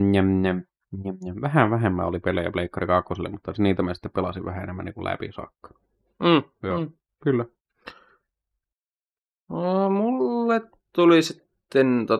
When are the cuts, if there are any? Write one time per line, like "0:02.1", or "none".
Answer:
none